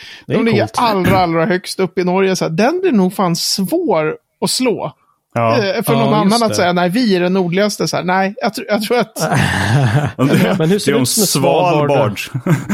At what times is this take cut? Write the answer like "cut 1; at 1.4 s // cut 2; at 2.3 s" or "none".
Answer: none